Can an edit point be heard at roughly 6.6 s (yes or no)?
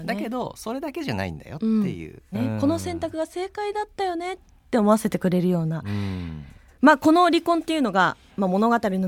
no